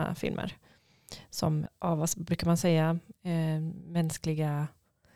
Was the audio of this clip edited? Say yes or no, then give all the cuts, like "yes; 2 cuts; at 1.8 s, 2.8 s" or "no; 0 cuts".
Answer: yes; 1 cut; at 1.7 s